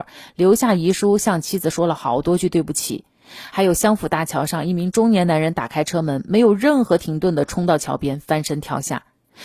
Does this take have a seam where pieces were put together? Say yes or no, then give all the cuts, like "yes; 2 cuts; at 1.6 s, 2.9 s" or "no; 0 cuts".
no; 0 cuts